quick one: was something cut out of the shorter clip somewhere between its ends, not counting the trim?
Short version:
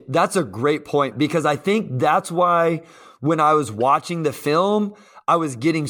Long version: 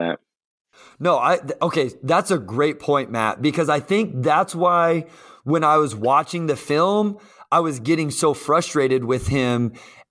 yes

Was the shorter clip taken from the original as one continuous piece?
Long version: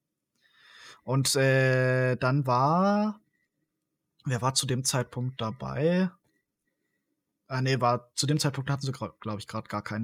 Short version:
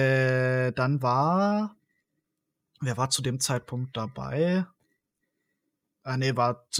yes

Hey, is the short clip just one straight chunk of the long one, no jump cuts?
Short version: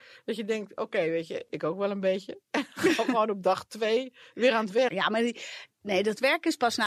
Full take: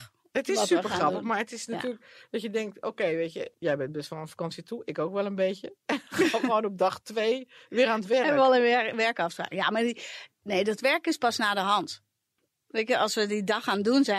no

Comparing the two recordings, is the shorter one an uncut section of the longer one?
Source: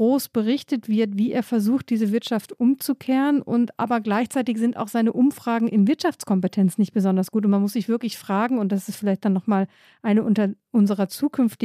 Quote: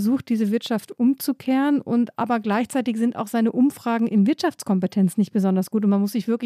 yes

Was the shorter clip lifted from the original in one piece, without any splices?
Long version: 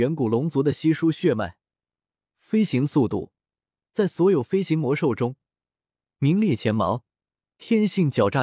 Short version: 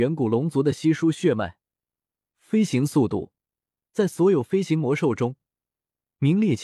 yes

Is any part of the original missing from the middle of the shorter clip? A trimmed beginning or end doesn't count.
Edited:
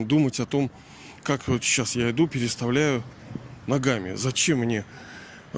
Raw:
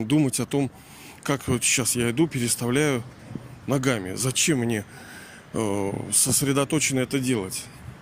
no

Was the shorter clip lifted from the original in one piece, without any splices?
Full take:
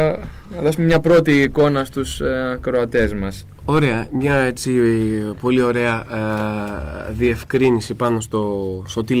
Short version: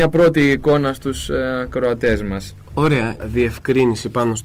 no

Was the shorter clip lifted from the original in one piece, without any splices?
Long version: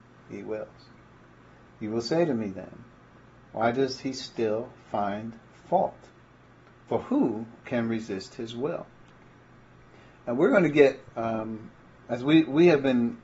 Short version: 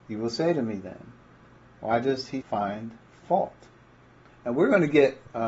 no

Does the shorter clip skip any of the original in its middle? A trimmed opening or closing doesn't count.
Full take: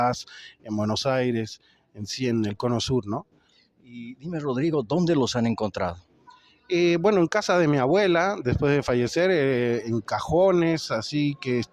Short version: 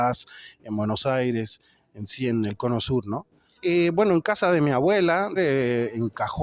yes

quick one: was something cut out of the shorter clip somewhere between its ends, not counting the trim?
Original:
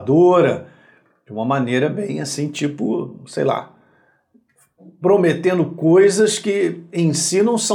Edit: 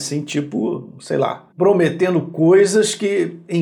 yes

